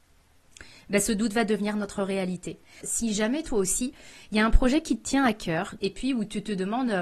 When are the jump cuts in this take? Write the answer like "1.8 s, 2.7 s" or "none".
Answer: 2.8 s, 5.8 s